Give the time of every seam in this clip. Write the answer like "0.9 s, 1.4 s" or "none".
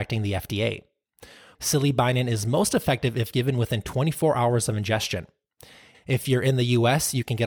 1.5 s, 5.9 s